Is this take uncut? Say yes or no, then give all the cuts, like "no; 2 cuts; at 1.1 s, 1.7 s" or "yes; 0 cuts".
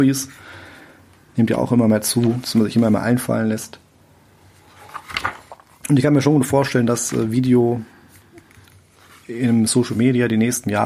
yes; 0 cuts